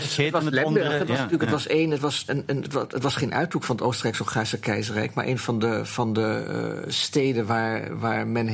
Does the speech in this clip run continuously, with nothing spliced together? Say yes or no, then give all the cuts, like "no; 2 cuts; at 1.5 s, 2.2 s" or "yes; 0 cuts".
no; 1 cut; at 2.3 s